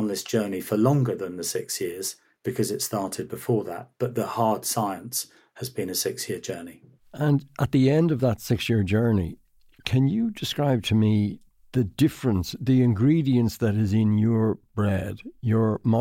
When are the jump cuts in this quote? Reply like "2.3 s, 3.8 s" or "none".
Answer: none